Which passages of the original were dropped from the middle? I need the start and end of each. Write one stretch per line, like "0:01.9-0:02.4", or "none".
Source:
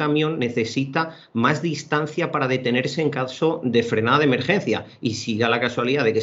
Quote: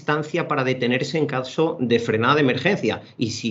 none